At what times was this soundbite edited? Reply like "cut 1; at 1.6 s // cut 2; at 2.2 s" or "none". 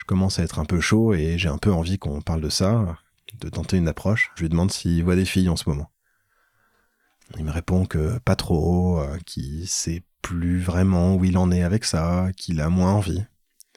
cut 1; at 4.4 s